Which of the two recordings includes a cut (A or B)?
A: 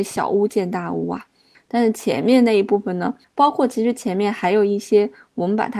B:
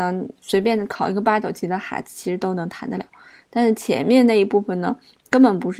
A